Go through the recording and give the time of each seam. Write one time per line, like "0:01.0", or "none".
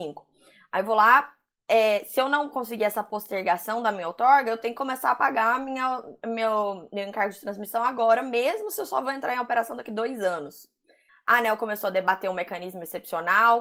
0:11.1